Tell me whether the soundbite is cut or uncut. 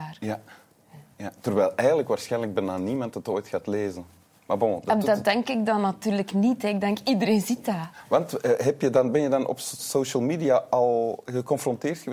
cut